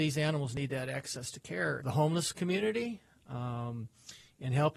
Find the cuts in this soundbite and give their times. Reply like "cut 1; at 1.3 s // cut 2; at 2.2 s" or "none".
cut 1; at 1.8 s